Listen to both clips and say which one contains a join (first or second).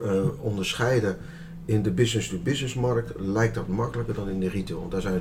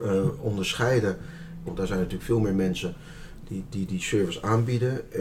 second